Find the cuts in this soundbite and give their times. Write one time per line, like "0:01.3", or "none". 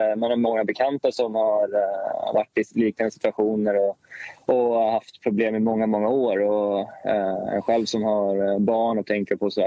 none

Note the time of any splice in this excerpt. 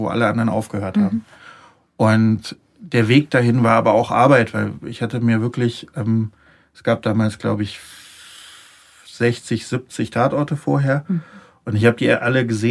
none

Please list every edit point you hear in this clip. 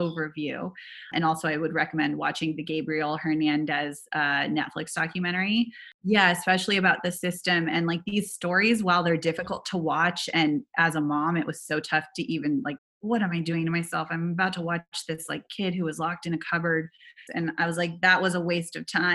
0:12.8
0:17.3

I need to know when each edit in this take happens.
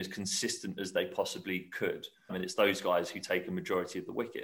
0:02.3

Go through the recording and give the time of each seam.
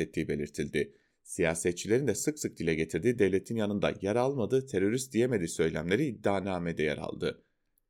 none

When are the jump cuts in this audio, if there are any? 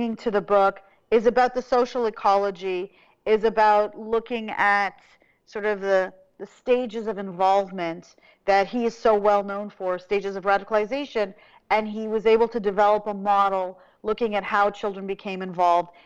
none

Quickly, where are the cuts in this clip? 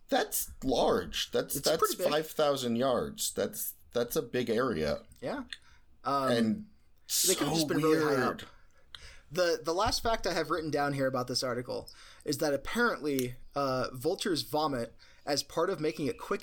none

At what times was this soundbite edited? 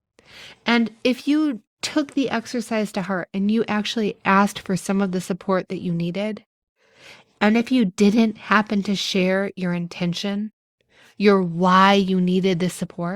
none

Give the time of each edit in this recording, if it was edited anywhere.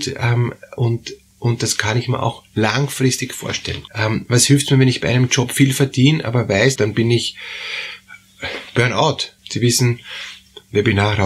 0:03.9
0:06.8
0:09.4

